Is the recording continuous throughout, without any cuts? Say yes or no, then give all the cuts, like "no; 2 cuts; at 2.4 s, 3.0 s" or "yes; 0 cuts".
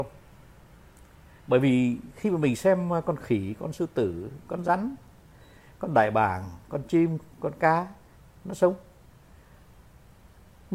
yes; 0 cuts